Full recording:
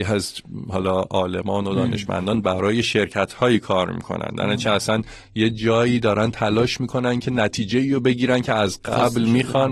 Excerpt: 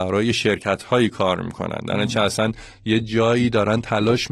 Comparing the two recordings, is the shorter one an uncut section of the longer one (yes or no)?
yes